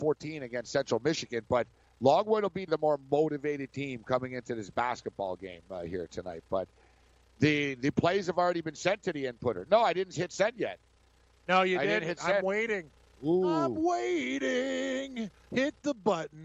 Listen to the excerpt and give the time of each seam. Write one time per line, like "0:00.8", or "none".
0:02.7